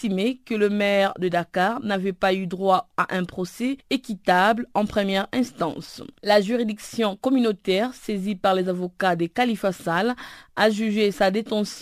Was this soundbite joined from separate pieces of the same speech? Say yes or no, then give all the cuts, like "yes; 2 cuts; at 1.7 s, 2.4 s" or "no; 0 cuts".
yes; 1 cut; at 6.2 s